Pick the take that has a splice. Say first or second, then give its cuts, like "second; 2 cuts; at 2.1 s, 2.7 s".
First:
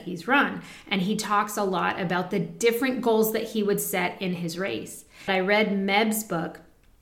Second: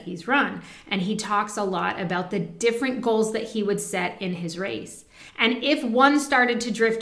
first; 1 cut; at 5.3 s